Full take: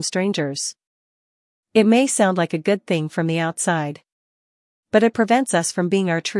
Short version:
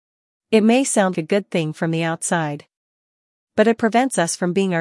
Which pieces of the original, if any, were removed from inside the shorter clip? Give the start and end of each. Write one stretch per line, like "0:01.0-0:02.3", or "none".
0:02.4-0:02.5